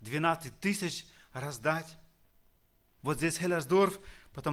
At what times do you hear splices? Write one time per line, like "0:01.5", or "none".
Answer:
0:03.0